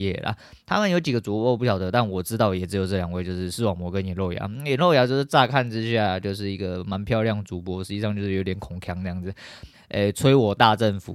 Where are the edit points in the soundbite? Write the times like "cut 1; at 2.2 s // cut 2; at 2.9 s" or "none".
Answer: cut 1; at 9.7 s